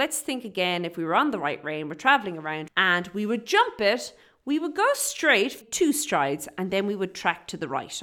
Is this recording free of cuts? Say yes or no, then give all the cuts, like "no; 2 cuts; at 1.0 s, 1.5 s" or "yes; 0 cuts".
no; 2 cuts; at 2.7 s, 5.6 s